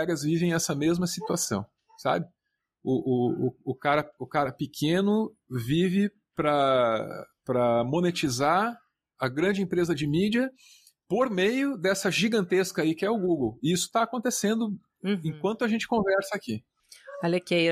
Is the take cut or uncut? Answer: uncut